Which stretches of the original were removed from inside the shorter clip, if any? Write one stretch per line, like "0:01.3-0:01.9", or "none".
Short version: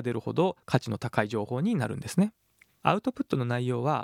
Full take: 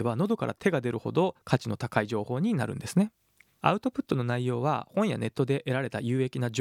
none